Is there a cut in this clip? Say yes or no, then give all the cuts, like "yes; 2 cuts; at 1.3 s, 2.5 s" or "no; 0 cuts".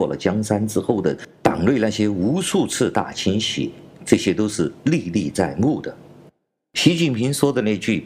no; 0 cuts